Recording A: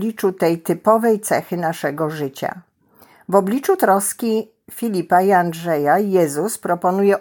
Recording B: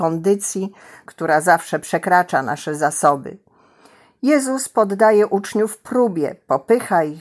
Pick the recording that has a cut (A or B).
B